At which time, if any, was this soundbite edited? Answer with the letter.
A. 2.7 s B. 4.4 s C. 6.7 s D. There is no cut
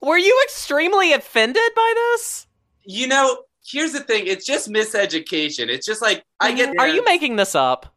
C